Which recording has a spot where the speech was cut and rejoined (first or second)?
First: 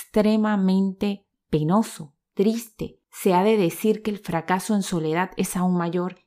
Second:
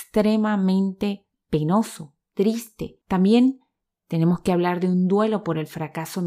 second